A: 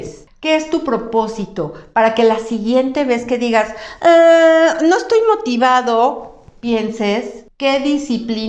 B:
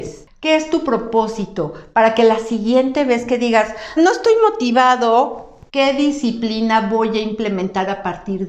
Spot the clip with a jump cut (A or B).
B